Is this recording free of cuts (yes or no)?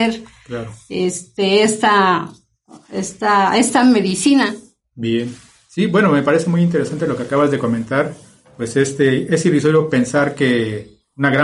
yes